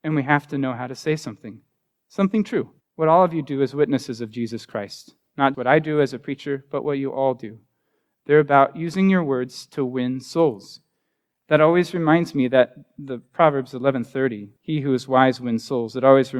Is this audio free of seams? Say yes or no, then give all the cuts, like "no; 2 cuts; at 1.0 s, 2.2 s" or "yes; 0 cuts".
no; 3 cuts; at 2.8 s, 5.5 s, 14.6 s